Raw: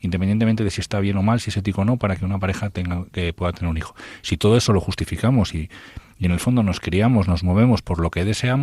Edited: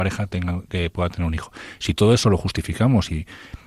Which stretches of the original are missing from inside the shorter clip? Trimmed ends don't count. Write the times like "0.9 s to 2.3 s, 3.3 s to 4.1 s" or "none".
none

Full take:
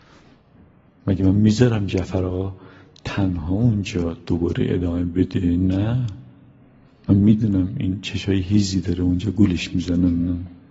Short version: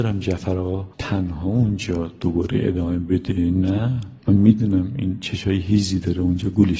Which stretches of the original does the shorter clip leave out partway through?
2.6 s to 3.0 s, 6.2 s to 7.0 s

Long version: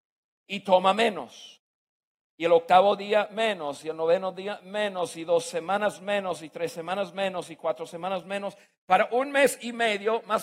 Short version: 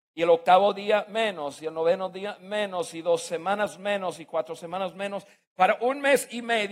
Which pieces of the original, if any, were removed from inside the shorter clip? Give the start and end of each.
6.4 s to 7.5 s

